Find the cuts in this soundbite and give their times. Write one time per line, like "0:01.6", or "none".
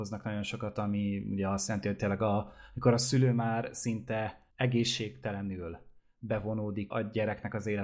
0:04.5
0:06.9